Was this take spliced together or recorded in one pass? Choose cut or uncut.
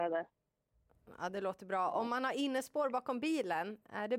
uncut